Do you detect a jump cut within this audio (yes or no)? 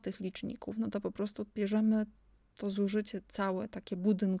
yes